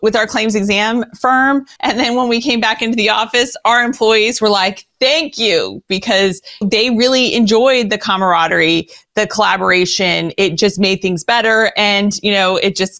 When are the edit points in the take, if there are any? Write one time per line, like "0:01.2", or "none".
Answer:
0:01.8
0:06.6